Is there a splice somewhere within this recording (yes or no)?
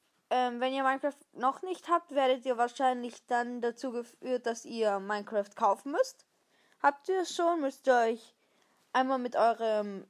no